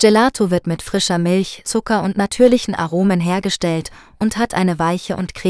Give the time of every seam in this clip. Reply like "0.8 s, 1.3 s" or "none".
1.6 s